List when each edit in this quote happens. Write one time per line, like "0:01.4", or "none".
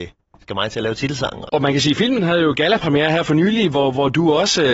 0:01.5